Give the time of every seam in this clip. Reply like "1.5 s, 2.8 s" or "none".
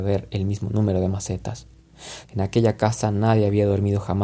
2.2 s